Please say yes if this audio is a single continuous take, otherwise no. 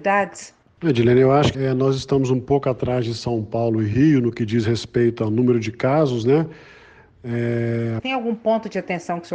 no